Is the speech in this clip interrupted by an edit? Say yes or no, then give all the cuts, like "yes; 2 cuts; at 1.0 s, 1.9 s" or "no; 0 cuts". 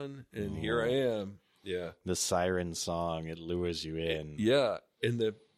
no; 0 cuts